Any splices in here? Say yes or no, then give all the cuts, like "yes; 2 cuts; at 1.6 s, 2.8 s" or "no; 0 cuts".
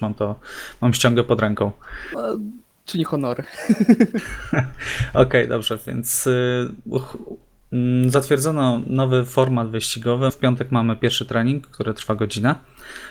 yes; 1 cut; at 10.3 s